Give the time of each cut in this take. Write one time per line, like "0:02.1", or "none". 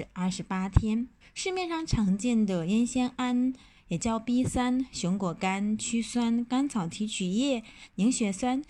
0:01.2